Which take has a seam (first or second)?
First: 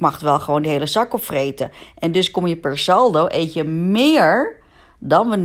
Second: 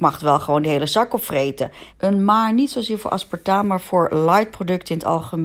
second